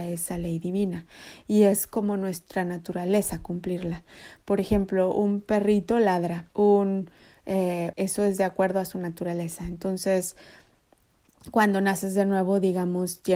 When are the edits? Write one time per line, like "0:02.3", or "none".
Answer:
0:06.5
0:07.9